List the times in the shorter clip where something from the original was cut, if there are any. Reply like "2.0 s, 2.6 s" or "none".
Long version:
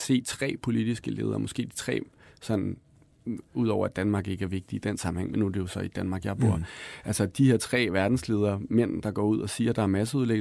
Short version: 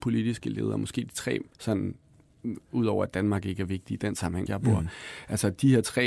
1.5 s, 4.5 s